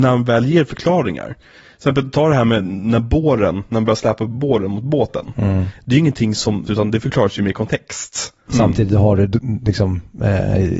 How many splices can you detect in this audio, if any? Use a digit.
2